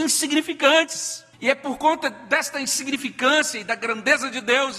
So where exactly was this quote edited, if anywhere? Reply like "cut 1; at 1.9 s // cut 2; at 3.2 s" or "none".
cut 1; at 1.3 s